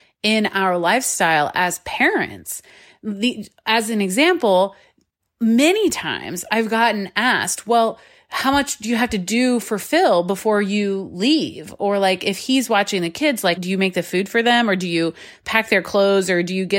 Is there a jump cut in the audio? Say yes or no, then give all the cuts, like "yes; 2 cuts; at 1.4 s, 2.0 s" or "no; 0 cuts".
yes; 1 cut; at 13.6 s